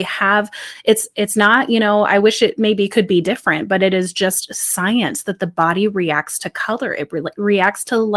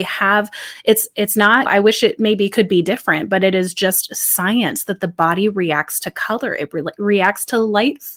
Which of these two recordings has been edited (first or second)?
second